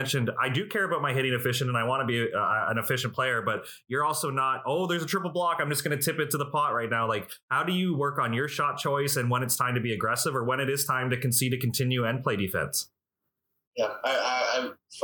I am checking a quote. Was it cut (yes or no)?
no